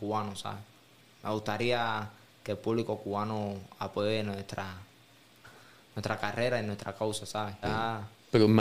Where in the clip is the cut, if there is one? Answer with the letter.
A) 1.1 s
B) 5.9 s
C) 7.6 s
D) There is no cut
C